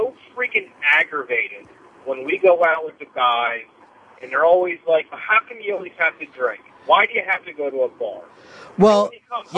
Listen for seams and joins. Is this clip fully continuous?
no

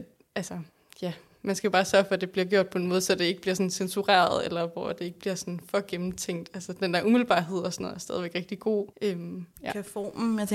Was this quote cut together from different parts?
yes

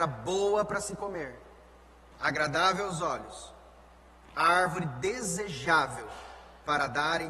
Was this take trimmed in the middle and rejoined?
no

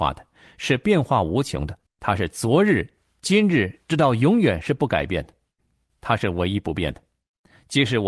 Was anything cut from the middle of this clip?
yes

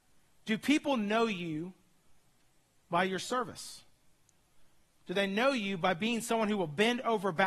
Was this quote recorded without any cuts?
yes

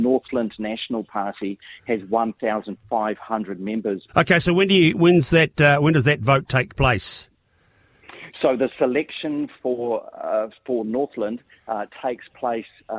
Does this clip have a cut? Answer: yes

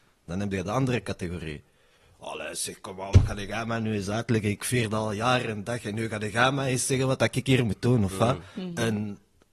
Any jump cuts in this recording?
no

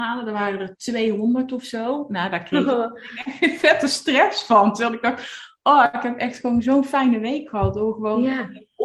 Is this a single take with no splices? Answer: yes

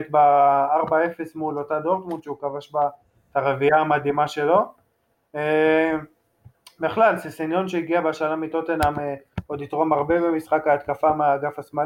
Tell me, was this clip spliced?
no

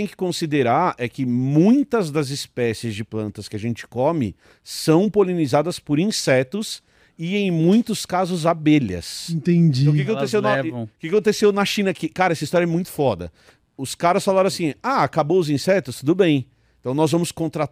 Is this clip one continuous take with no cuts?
yes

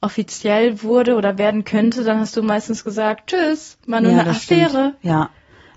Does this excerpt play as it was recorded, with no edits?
yes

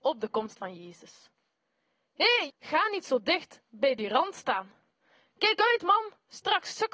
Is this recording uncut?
no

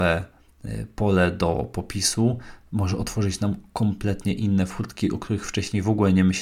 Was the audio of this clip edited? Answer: no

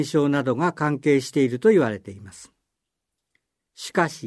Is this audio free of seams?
yes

